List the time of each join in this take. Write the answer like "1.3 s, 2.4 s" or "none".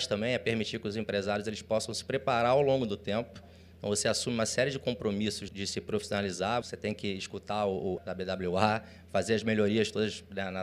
5.5 s, 6.6 s, 8.0 s